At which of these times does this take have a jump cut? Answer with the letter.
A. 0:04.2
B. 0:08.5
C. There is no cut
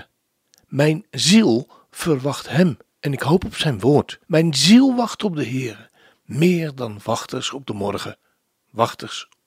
A